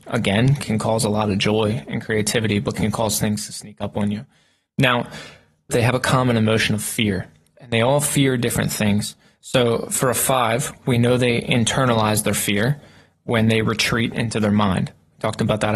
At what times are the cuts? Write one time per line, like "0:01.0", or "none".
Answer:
0:05.7